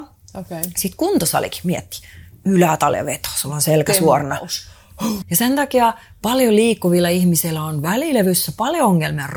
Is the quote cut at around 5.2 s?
yes; 1 cut; at 5.2 s

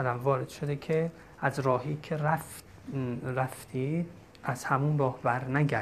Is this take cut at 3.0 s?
no; 1 cut; at 4.3 s

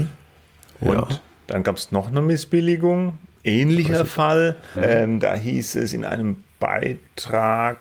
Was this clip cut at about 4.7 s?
yes; 1 cut; at 4.7 s

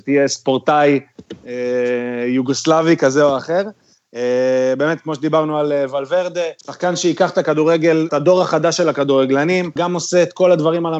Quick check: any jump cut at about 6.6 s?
yes; 3 cuts; at 6.6 s, 8.1 s, 9.8 s

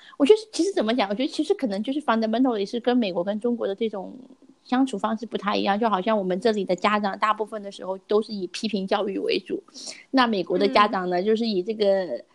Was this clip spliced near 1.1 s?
no; 0 cuts

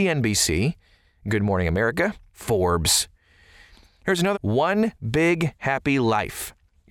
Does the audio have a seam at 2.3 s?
yes; 2 cuts; at 2.3 s, 4.3 s

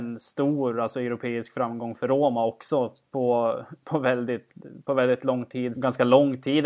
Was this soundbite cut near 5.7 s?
yes; 1 cut; at 5.7 s

